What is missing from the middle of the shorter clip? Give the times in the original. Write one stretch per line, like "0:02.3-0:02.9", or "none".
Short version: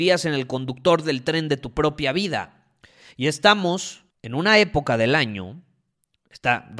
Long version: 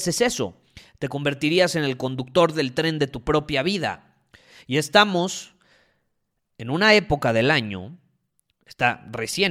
0:05.6-0:06.5